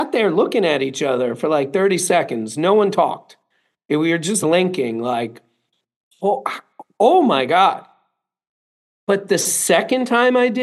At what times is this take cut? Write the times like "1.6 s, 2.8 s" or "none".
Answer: 4.4 s

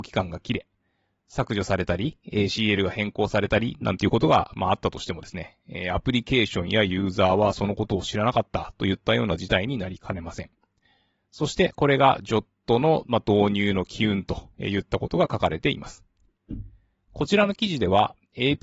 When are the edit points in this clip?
none

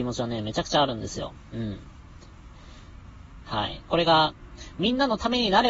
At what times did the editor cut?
3.4 s

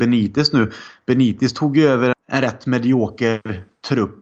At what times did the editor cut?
2.1 s

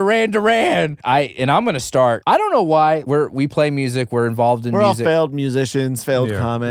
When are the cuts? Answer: 3.0 s

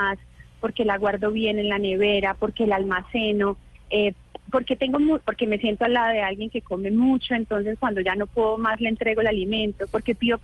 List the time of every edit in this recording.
none

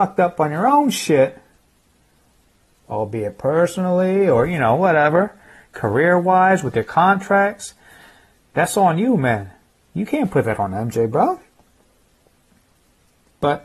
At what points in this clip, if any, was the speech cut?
none

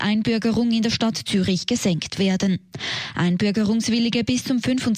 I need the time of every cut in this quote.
none

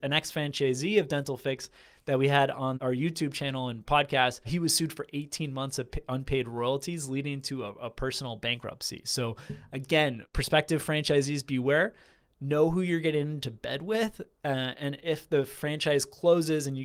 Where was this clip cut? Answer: none

